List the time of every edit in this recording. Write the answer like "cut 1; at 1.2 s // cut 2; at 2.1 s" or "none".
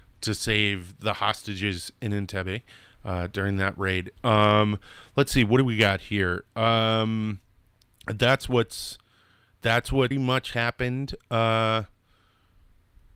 cut 1; at 4.2 s // cut 2; at 10.1 s